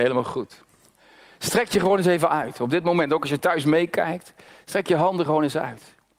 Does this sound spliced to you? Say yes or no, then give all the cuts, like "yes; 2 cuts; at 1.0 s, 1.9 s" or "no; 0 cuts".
no; 0 cuts